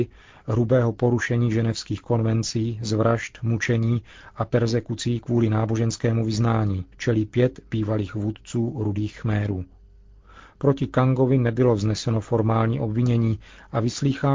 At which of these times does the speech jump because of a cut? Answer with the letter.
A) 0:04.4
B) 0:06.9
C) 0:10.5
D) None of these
B